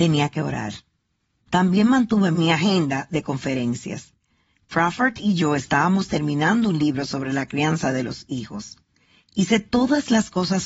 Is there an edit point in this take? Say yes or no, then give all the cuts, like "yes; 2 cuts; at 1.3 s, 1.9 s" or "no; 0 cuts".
no; 0 cuts